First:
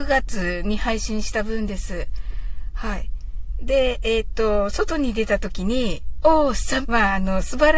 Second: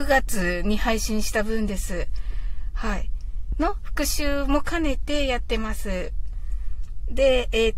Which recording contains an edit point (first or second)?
first